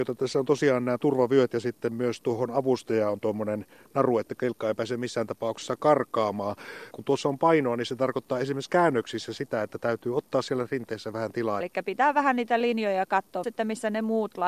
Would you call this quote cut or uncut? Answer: cut